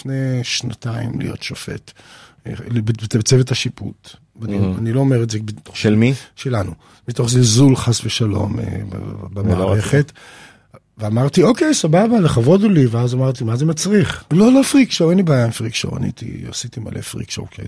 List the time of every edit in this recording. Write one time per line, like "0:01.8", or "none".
0:14.3